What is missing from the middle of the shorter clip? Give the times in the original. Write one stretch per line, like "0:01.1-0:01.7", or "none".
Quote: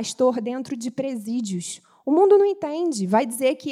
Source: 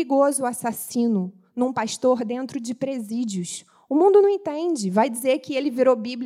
none